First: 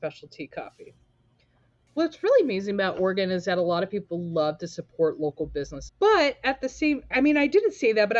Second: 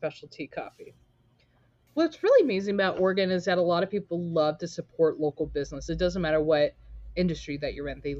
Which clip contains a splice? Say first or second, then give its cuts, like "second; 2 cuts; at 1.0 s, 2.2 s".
first; 2 cuts; at 5.9 s, 7.1 s